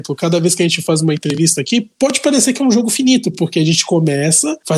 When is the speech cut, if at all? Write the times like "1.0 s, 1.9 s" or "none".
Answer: none